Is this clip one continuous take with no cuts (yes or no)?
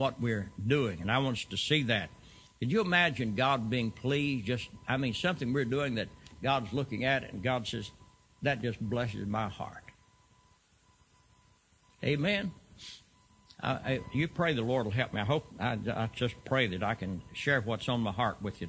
yes